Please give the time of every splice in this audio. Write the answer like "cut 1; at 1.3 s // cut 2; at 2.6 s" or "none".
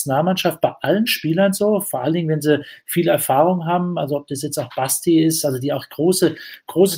none